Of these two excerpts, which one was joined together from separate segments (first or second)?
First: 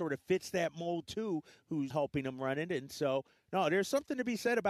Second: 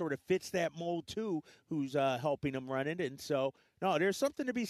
first